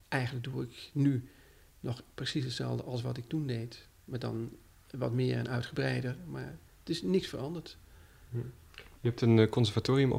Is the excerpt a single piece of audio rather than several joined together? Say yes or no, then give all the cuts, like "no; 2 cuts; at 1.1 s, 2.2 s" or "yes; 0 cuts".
yes; 0 cuts